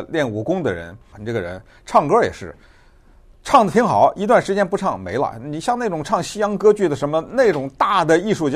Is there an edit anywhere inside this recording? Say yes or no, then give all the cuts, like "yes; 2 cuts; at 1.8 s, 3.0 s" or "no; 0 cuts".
yes; 1 cut; at 1.1 s